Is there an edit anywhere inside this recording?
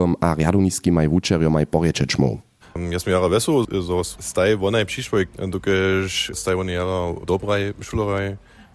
yes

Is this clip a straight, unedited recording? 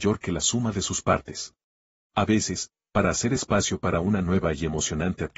no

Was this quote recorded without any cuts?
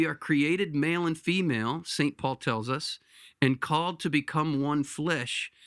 yes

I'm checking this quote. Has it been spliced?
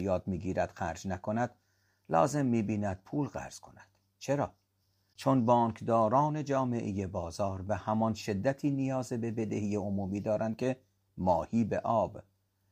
no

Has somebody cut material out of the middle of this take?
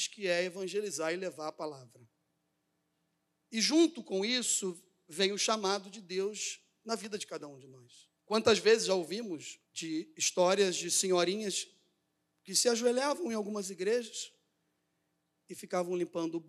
yes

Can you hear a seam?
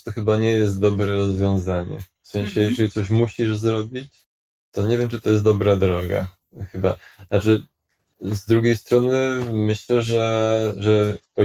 no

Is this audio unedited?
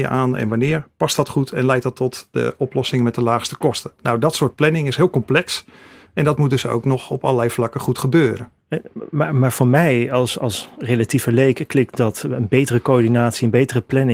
yes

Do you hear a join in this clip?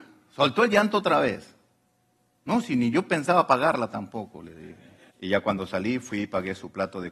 yes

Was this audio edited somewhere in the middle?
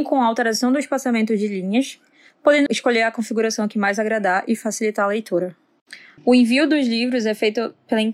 yes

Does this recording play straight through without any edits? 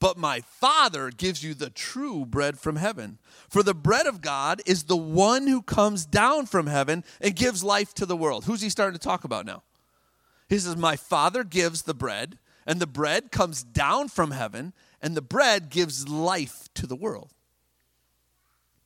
yes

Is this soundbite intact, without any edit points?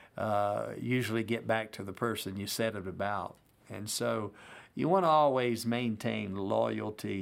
yes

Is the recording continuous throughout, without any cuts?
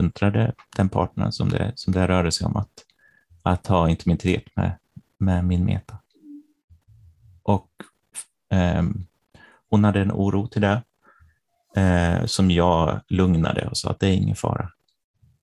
yes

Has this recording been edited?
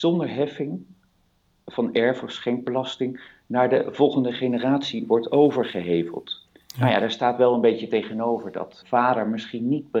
yes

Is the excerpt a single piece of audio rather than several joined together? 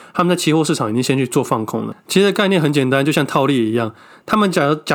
yes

